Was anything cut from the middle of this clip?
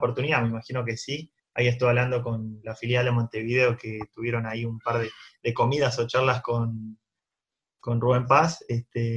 no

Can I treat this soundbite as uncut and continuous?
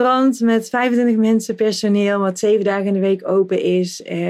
yes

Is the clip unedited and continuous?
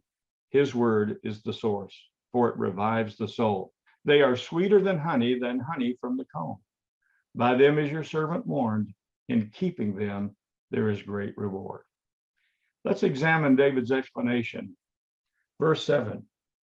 no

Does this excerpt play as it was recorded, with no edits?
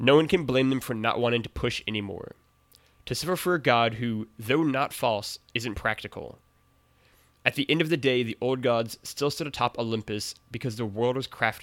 yes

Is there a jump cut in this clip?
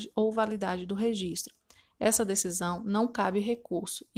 no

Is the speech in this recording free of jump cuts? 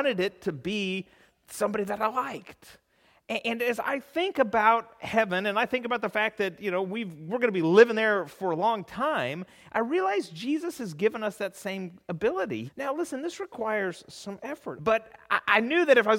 no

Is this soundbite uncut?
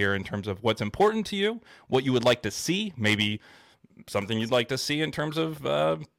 yes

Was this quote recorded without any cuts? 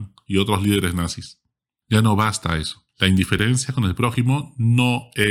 no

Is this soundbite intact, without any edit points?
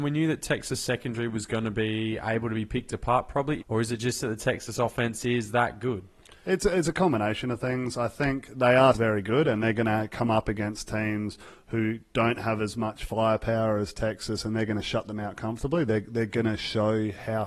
no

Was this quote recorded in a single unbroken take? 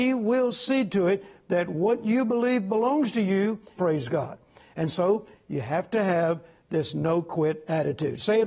no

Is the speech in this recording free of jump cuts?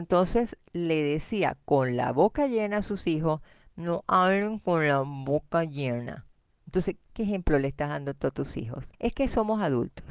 no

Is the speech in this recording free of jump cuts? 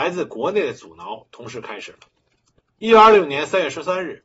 yes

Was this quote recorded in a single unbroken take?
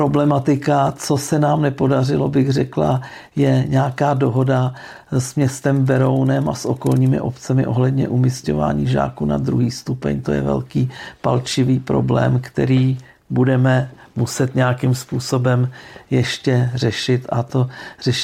yes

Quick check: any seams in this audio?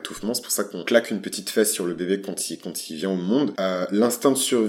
no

